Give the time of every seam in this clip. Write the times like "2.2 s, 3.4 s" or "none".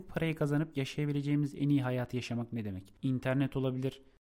3.0 s